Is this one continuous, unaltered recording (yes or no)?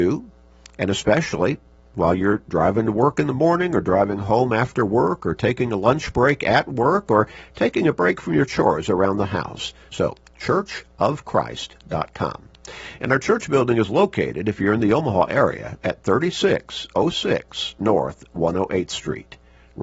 no